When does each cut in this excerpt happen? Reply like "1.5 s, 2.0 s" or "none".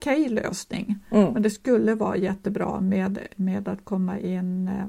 none